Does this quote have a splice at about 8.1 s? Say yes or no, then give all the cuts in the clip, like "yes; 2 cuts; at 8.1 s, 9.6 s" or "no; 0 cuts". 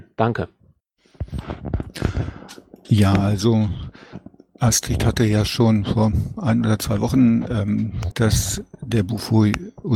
yes; 1 cut; at 8.1 s